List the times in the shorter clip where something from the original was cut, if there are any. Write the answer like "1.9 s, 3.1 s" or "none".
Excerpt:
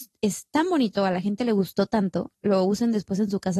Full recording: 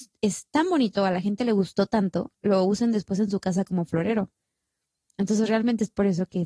none